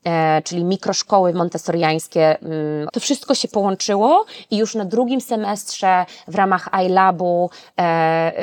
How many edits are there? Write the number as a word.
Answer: one